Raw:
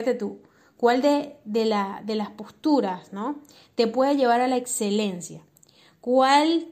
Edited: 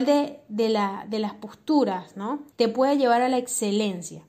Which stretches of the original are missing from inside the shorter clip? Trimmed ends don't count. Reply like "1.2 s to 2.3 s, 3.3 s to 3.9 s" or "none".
3.5 s to 3.7 s